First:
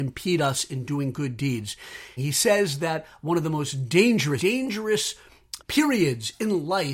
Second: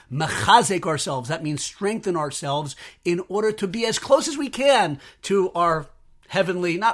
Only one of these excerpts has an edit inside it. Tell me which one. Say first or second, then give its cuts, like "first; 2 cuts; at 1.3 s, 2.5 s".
first; 3 cuts; at 2.2 s, 4.4 s, 5.6 s